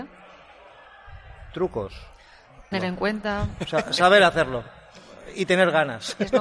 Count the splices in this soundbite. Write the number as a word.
one